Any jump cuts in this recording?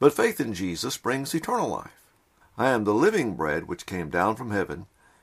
yes; 1 cut; at 2.4 s

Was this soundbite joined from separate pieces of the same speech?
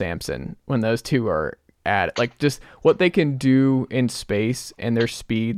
no; 0 cuts

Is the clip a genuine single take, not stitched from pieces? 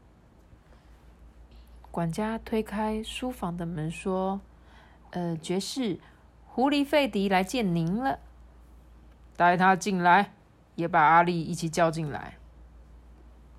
yes; 0 cuts

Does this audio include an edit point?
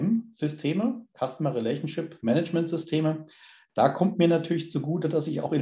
no; 0 cuts

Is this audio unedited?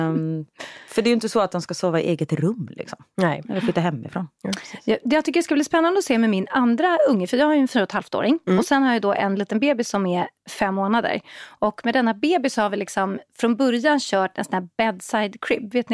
yes; 0 cuts

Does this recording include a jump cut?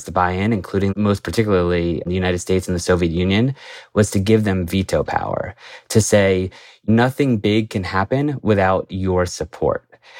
no; 0 cuts

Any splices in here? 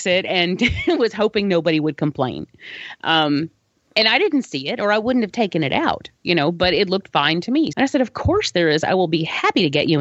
yes; 1 cut; at 7.7 s

